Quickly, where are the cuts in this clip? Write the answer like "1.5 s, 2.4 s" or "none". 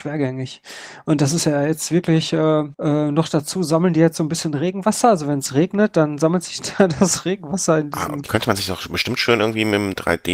2.7 s, 8.3 s

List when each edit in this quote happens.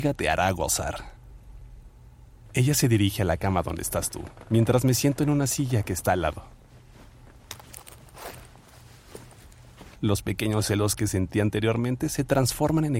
2.5 s, 10.0 s

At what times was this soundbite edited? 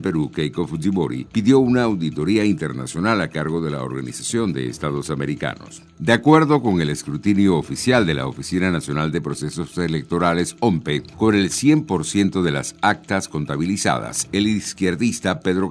none

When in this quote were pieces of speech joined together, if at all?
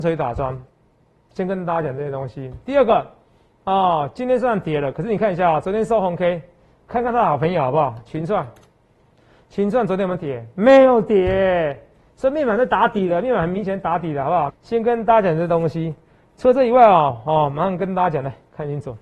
14.5 s

